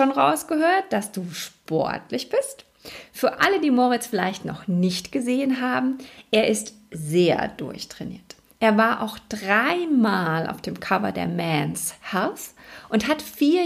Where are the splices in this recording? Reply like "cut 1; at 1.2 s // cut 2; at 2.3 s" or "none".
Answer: none